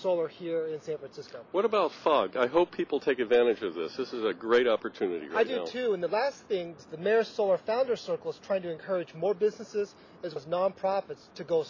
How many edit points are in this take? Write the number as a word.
two